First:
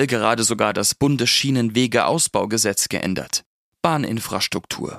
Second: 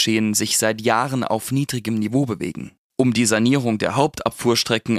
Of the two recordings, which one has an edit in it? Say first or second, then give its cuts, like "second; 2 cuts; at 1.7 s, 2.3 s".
second; 1 cut; at 2.8 s